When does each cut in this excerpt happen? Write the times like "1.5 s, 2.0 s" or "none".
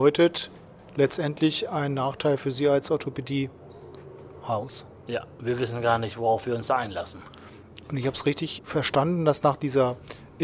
8.6 s